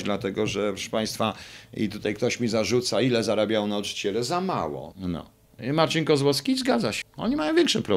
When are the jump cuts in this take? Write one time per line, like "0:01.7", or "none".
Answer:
0:04.9
0:07.0